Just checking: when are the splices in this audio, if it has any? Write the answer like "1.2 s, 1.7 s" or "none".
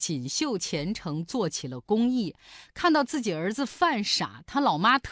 none